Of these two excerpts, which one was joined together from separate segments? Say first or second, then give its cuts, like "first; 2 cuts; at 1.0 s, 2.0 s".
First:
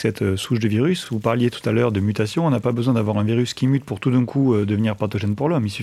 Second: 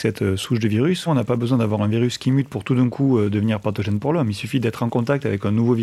second; 1 cut; at 1.1 s